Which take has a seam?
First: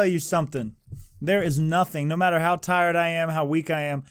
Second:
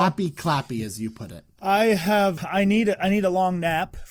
second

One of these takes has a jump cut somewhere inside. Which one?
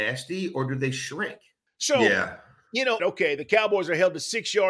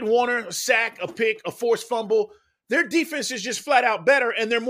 first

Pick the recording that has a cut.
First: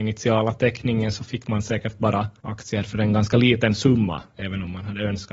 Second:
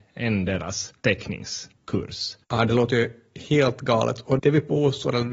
second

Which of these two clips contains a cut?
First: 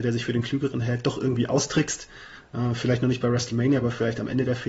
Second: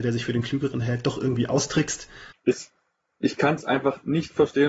second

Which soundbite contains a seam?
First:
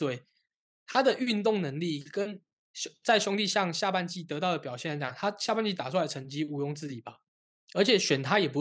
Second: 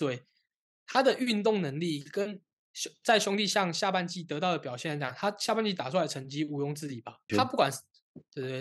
second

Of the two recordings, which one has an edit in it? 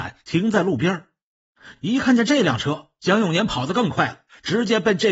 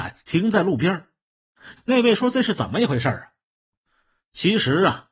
second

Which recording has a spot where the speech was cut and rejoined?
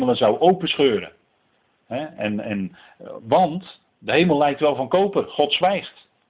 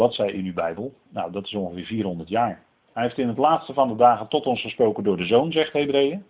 second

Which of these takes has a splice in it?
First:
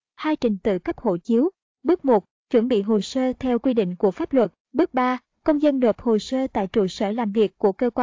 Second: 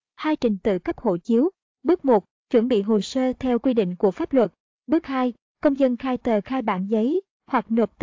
first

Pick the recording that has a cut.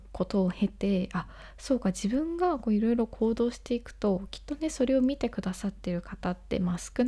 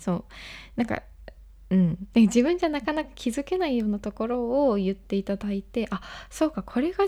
second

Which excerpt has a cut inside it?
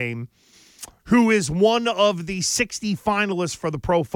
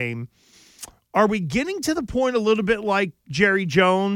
first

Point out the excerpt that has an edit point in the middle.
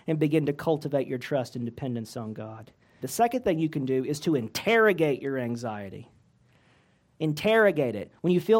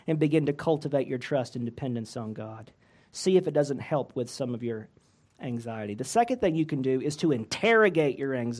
first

